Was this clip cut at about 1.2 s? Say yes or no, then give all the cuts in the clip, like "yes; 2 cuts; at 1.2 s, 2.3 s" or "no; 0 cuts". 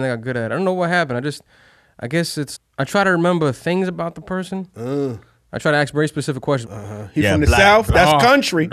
no; 2 cuts; at 2.6 s, 6.7 s